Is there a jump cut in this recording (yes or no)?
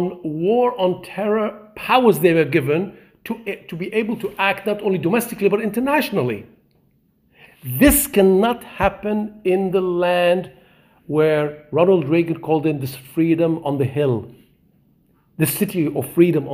yes